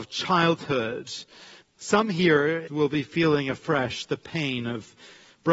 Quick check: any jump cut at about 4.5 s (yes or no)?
no